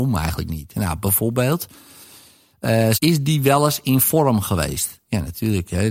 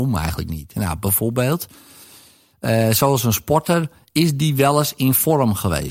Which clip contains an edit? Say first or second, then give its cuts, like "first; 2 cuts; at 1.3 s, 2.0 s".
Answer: first; 1 cut; at 2.9 s